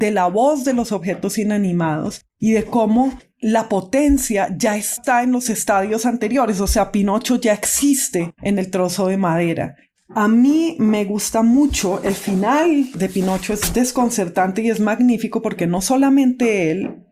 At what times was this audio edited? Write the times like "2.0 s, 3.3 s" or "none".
9.9 s